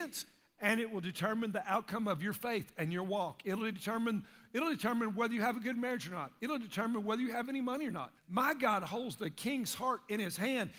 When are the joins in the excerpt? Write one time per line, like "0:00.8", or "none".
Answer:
0:08.2